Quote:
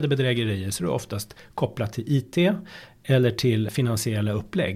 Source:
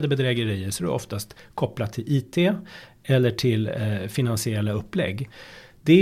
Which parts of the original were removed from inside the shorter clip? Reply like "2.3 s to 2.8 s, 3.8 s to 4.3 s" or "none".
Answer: 3.7 s to 4.1 s